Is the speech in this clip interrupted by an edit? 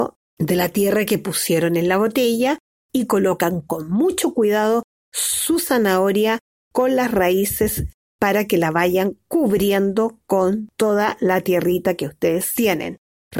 no; 0 cuts

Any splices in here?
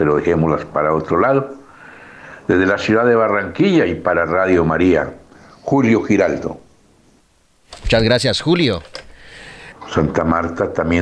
yes; 1 cut; at 9.7 s

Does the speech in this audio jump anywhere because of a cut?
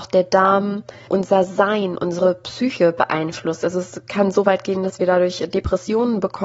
yes; 1 cut; at 1.1 s

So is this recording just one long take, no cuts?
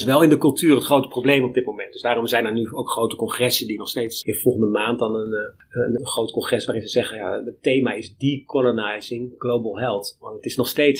no; 2 cuts; at 4.2 s, 6.0 s

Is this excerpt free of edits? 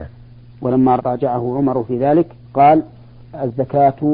no; 2 cuts; at 1.0 s, 2.4 s

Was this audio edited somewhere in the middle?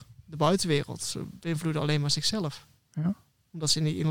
no; 0 cuts

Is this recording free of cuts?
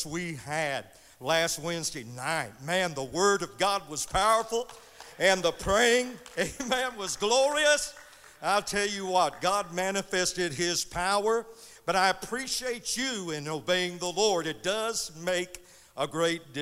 yes; 0 cuts

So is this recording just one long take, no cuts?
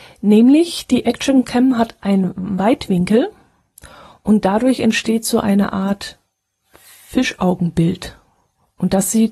yes; 0 cuts

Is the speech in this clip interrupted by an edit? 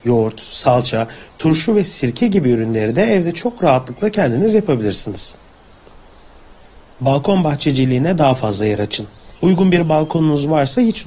yes; 1 cut; at 9.4 s

